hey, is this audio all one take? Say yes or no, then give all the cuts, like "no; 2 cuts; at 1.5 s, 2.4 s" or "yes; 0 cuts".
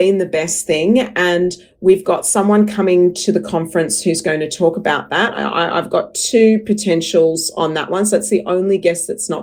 no; 1 cut; at 5.3 s